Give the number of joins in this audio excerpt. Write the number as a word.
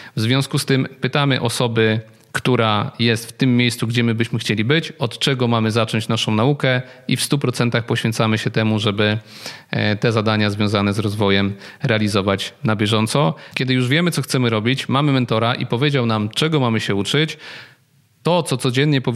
one